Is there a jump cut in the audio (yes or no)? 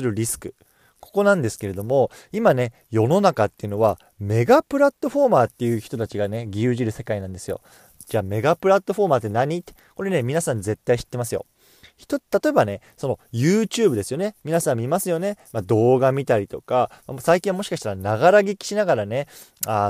no